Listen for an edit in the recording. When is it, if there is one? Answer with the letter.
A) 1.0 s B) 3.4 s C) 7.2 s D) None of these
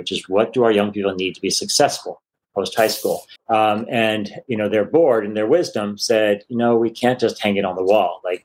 B